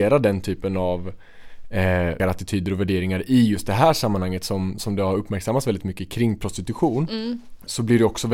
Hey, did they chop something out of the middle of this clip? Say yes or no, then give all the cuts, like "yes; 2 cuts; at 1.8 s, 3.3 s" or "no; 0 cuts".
yes; 1 cut; at 2.2 s